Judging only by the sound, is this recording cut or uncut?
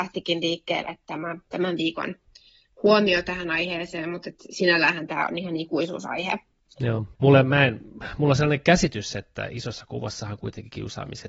cut